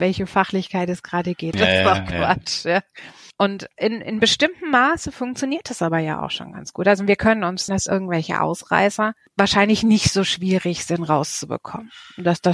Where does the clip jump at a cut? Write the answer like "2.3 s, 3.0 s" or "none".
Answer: 1.5 s, 7.7 s